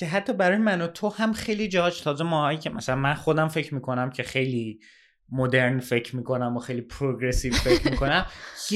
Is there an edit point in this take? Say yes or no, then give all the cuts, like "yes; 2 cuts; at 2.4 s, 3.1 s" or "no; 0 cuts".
no; 0 cuts